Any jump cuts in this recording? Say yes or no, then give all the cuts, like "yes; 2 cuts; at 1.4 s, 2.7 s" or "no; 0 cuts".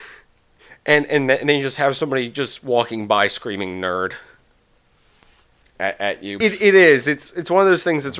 yes; 1 cut; at 6.4 s